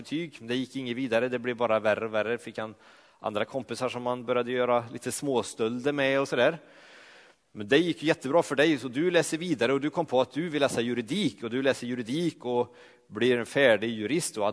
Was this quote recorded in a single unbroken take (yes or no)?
yes